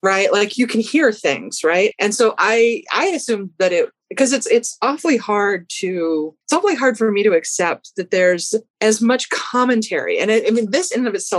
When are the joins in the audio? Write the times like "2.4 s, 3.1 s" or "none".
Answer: 1.9 s, 6.4 s, 8.7 s